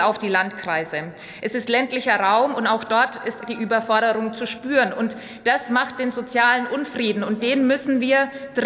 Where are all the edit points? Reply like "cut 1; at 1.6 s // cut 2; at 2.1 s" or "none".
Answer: cut 1; at 3.4 s